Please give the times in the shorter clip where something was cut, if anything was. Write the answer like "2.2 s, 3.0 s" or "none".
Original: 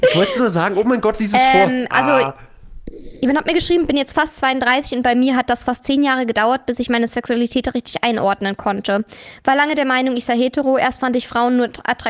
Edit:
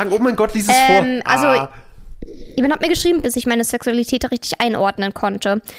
3.2 s